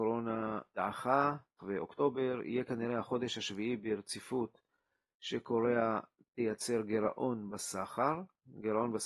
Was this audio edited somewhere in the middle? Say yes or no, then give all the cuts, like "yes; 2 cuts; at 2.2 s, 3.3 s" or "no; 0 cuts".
yes; 1 cut; at 1.6 s